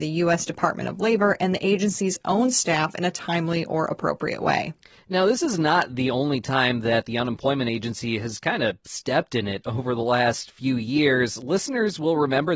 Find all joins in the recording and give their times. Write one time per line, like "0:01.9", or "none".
none